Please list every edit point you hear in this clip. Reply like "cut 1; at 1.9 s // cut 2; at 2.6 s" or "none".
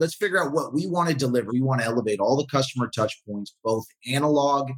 cut 1; at 1.5 s